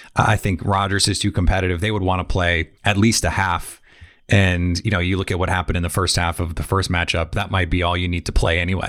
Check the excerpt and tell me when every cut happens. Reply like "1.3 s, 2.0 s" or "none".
2.8 s

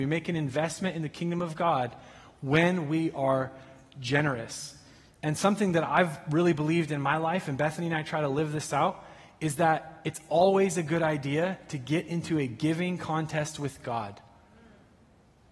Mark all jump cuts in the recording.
none

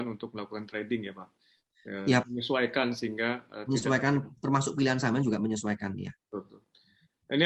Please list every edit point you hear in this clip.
2.2 s

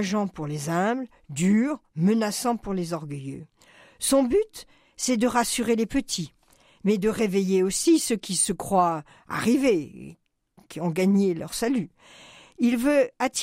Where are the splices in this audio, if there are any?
10.7 s

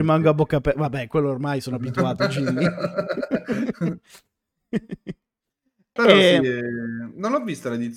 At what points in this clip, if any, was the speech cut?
6.0 s

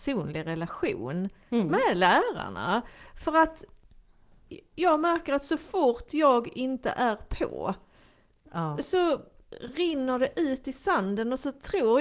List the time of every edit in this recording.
8.8 s

